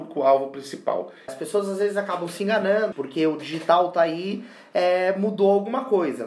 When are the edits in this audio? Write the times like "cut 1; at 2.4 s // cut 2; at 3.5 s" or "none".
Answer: cut 1; at 1.3 s // cut 2; at 2.9 s